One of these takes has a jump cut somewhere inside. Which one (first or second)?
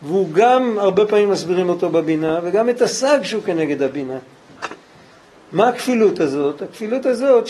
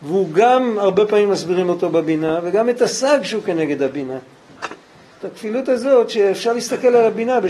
second